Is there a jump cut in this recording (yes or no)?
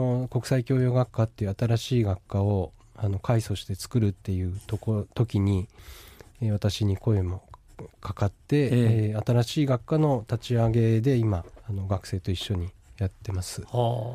yes